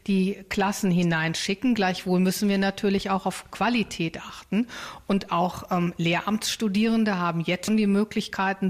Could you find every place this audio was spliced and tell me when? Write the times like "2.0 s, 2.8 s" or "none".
7.7 s